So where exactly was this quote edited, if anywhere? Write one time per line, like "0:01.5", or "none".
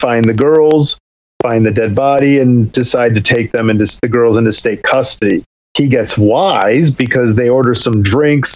0:05.5